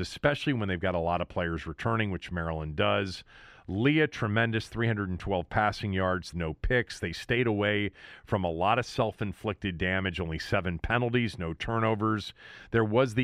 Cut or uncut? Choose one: cut